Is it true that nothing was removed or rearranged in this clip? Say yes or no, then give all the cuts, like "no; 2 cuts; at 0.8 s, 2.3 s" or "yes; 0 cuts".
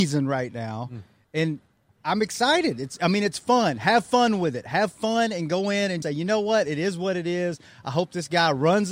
no; 1 cut; at 6.0 s